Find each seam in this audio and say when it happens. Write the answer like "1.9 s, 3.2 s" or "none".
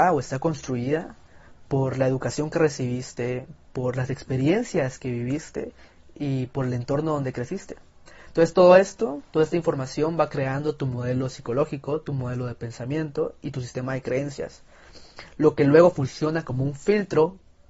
none